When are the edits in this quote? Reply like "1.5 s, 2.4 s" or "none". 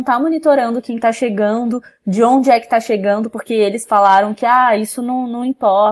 none